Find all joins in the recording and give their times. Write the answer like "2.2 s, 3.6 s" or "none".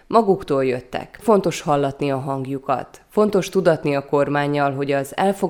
1.2 s